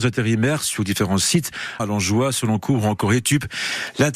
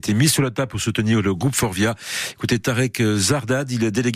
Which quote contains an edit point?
first; 1 cut; at 1.8 s

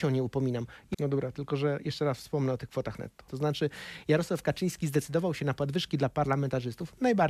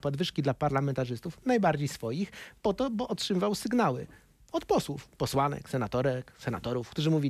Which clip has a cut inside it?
first; 2 cuts; at 0.9 s, 3.3 s

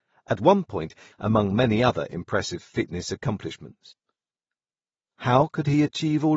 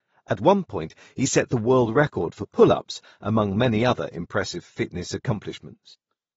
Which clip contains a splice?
first; 1 cut; at 1.1 s

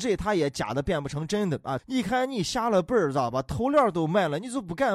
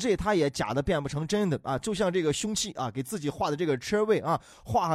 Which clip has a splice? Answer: first; 1 cut; at 1.8 s

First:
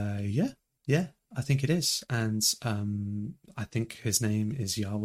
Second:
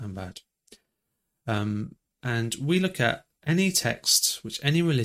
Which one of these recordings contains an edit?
second; 2 cuts; at 2.2 s, 3.4 s

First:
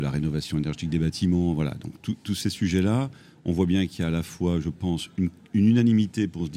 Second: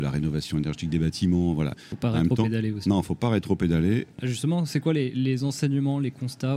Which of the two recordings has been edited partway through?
second; 2 cuts; at 1.7 s, 4.1 s

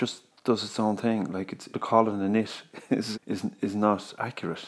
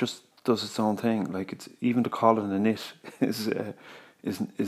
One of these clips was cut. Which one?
first; 2 cuts; at 1.7 s, 3.1 s

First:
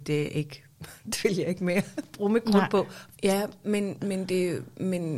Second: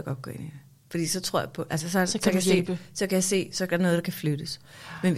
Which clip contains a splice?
first; 1 cut; at 3.1 s

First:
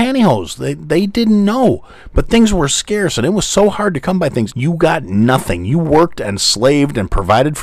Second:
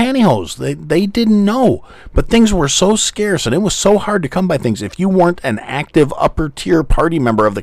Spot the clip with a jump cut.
first; 2 cuts; at 2.7 s, 4.5 s

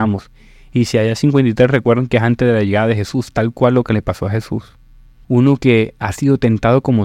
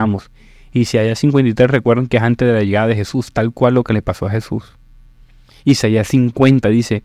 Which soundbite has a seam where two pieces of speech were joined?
first; 1 cut; at 5.2 s

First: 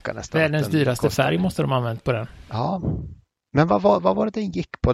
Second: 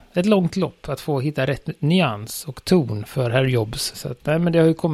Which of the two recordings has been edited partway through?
second; 1 cut; at 3.9 s

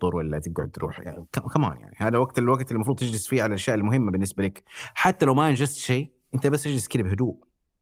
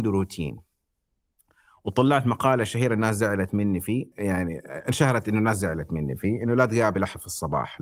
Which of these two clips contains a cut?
second; 1 cut; at 4.1 s

